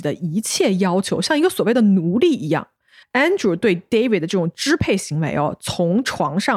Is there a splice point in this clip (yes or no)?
yes